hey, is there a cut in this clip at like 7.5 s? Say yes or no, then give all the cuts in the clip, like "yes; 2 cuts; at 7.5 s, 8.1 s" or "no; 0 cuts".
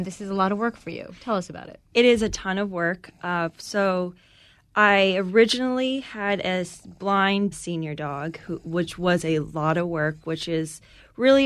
yes; 1 cut; at 7.5 s